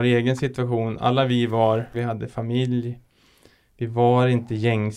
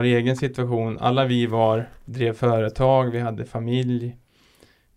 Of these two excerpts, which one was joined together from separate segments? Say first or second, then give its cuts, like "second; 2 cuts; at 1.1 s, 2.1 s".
first; 1 cut; at 1.9 s